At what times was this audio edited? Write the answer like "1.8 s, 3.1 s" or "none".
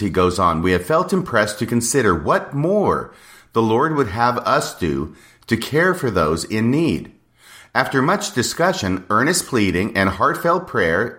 none